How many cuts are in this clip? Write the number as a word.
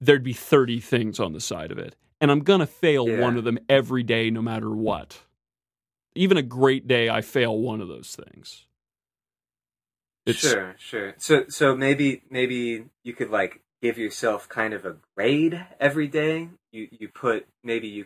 two